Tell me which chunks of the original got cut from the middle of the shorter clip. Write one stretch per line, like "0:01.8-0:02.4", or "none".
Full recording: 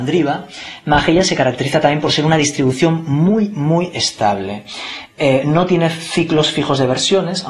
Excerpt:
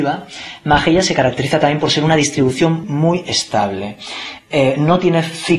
0:03.0-0:03.5